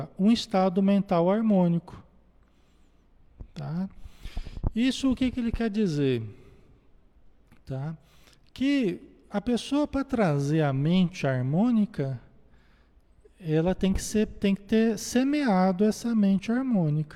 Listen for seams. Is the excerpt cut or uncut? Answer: uncut